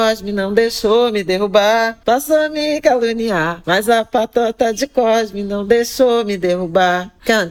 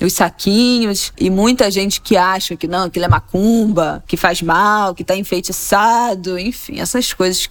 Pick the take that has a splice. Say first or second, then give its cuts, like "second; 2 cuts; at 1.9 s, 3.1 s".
first; 1 cut; at 2.0 s